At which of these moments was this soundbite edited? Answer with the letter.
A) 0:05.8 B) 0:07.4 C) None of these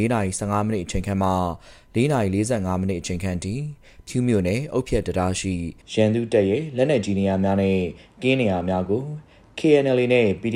A